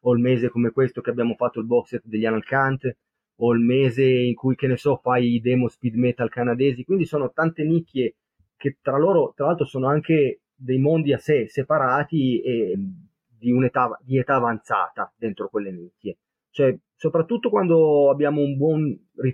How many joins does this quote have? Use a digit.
1